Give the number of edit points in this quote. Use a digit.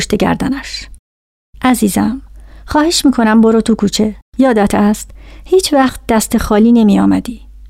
1